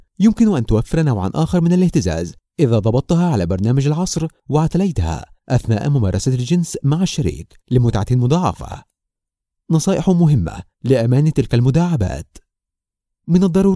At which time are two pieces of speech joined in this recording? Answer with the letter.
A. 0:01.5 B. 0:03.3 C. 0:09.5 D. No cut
C